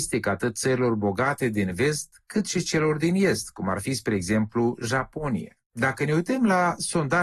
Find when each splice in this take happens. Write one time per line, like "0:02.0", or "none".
0:05.6